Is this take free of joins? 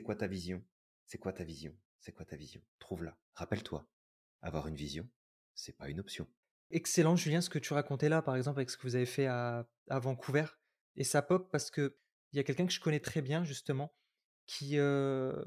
no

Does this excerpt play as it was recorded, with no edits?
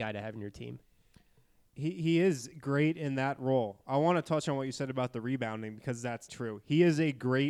no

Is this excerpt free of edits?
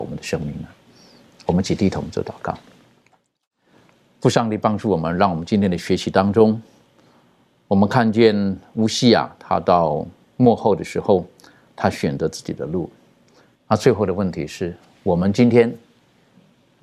no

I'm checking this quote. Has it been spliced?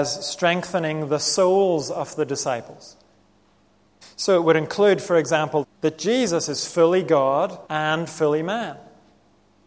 yes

